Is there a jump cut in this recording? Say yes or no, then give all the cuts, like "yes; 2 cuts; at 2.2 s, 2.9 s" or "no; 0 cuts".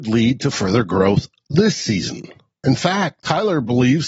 yes; 1 cut; at 2.6 s